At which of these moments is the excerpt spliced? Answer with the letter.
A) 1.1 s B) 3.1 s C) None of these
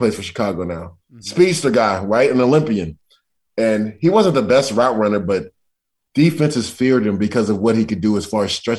C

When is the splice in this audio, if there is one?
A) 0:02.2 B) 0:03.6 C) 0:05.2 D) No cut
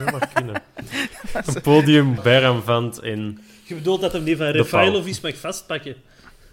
A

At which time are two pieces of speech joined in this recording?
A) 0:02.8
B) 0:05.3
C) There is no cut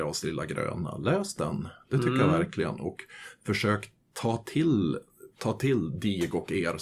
B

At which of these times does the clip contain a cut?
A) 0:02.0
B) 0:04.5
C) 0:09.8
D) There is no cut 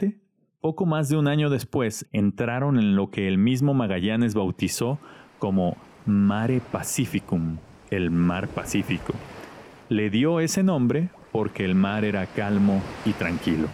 A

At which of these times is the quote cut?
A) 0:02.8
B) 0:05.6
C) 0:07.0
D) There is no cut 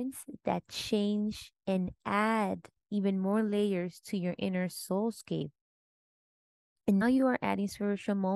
C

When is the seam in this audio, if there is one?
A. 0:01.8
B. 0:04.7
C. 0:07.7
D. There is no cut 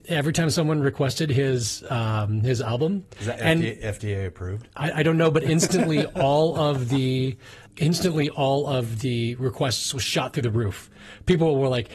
C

